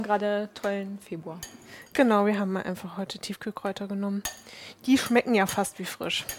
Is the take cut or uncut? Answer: uncut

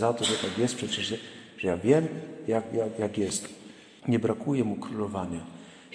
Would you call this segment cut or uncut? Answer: cut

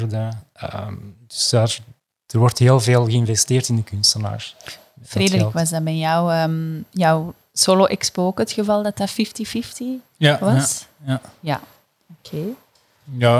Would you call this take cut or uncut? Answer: uncut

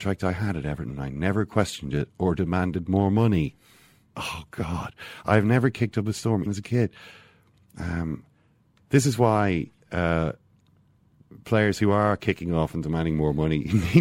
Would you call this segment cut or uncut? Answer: cut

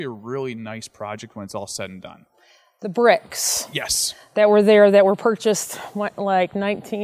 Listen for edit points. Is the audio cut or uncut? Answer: uncut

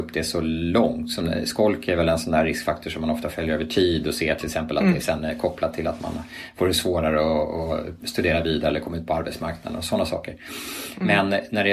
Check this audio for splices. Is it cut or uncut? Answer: uncut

